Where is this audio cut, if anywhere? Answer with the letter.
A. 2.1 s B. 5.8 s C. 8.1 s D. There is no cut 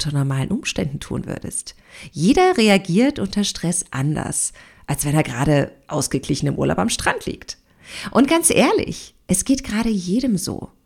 D